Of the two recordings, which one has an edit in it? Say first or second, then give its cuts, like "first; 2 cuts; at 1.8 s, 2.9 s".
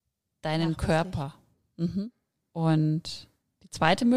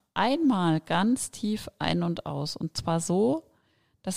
first; 1 cut; at 2.4 s